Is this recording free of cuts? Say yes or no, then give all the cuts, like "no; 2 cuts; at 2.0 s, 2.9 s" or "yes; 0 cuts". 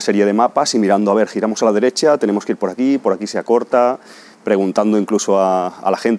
yes; 0 cuts